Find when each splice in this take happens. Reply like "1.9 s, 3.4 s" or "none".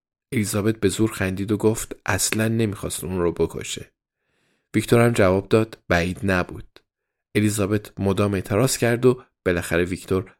none